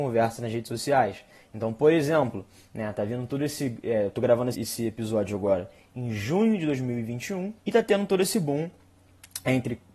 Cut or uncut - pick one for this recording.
cut